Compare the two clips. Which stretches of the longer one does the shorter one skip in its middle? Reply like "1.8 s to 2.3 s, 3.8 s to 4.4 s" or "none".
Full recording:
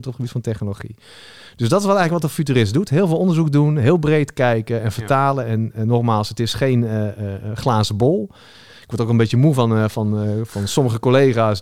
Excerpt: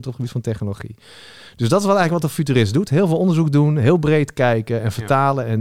none